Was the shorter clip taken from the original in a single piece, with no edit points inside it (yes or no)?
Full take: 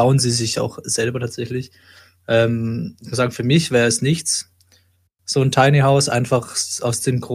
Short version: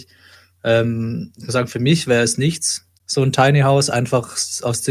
no